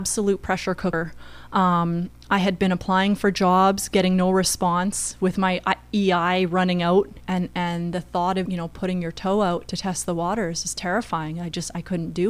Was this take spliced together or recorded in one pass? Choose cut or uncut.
cut